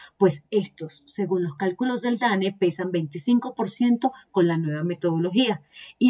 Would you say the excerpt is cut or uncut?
uncut